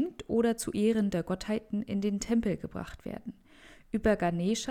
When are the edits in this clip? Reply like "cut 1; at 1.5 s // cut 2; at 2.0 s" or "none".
none